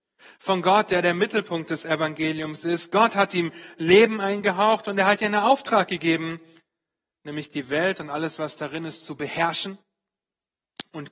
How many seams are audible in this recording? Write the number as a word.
zero